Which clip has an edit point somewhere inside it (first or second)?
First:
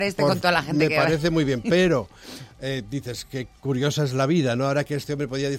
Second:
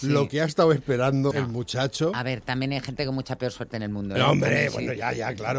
second